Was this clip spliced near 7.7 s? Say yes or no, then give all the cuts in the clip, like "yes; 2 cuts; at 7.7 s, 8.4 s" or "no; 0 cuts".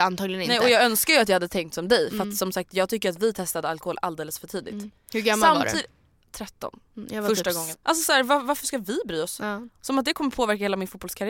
yes; 1 cut; at 7.7 s